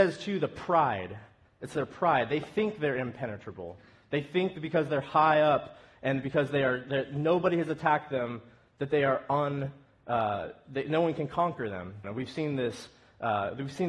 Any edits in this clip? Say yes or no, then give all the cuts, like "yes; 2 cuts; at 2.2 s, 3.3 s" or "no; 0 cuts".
yes; 1 cut; at 12.0 s